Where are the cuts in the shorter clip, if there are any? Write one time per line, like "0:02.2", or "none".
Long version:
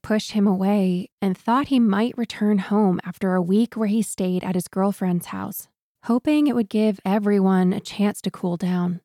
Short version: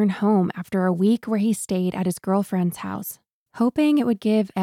none

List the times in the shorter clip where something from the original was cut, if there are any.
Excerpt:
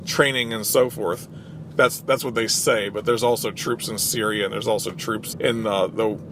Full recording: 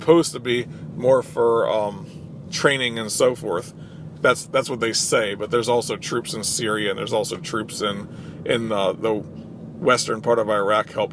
0:05.3

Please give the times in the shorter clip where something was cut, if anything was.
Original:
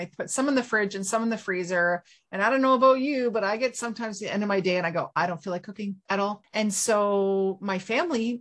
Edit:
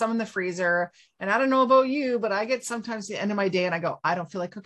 none

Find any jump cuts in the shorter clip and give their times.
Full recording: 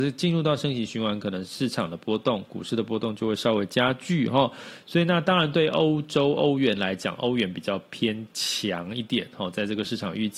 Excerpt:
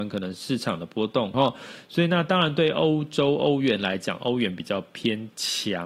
0:01.3

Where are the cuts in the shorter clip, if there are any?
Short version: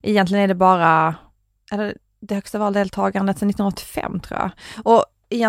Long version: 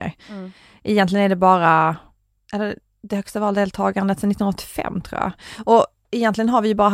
none

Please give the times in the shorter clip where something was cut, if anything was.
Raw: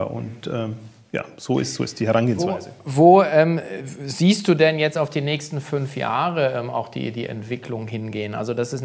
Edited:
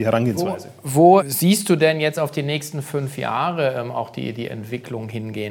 0:01.2

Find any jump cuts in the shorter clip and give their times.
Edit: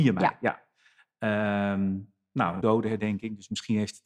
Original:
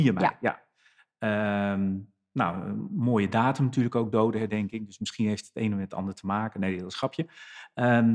0:02.6

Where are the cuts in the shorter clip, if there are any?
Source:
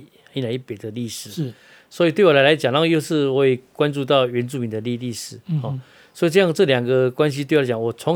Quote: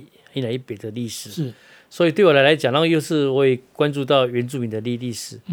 none

